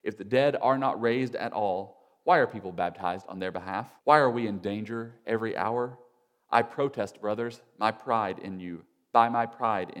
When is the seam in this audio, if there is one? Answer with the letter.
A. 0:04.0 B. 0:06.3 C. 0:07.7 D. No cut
A